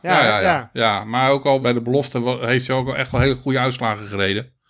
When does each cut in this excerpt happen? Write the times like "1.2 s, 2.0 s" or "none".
1.6 s